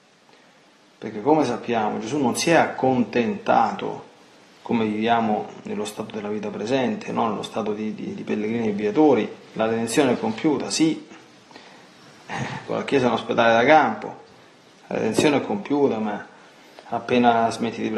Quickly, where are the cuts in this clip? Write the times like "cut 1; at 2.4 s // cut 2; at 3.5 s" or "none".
cut 1; at 9.5 s // cut 2; at 12.7 s